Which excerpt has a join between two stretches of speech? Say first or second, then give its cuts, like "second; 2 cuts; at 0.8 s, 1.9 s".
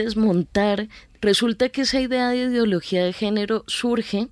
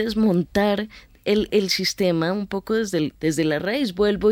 first; 1 cut; at 1.2 s